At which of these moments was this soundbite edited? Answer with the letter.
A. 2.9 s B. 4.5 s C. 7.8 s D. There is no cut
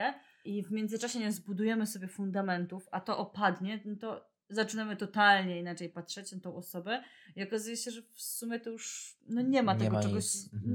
D